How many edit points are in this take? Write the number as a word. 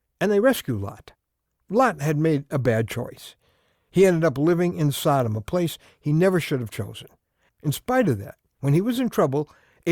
one